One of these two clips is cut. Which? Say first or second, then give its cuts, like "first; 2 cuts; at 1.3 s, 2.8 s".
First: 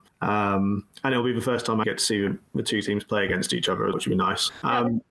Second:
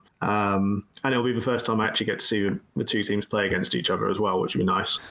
first; 2 cuts; at 1.8 s, 3.9 s